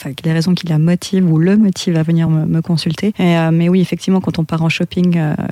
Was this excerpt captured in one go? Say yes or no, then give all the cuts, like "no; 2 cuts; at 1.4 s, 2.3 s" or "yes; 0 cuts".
yes; 0 cuts